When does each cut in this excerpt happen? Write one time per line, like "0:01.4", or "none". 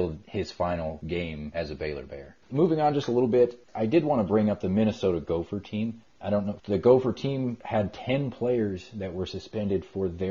0:02.4
0:06.6